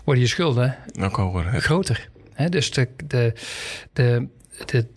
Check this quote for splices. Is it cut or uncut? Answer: uncut